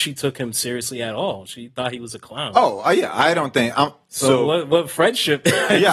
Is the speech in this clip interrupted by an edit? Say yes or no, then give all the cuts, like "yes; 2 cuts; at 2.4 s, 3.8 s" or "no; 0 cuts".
no; 0 cuts